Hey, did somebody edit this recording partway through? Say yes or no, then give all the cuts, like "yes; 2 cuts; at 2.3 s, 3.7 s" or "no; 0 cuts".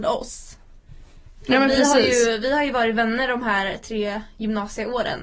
no; 0 cuts